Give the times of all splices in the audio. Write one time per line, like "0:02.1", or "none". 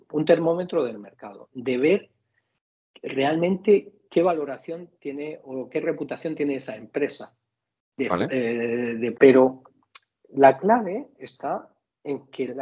0:09.1